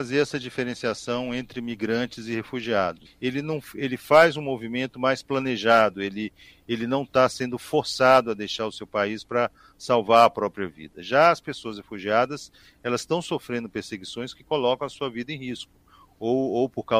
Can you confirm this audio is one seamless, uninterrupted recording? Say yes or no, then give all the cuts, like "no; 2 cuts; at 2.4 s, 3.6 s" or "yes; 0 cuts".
no; 1 cut; at 3.0 s